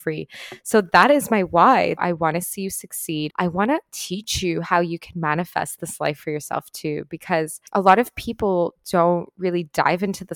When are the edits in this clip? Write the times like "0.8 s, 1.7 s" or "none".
2.0 s, 3.3 s, 7.7 s